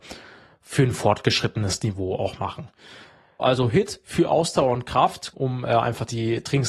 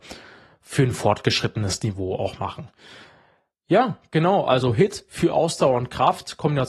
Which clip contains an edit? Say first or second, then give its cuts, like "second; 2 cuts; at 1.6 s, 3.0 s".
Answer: first; 2 cuts; at 3.4 s, 5.3 s